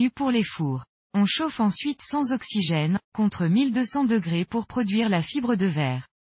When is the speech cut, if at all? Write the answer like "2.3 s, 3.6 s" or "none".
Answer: 1.0 s, 3.0 s